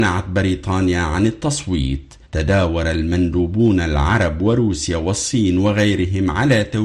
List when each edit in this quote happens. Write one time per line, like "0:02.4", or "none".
0:02.2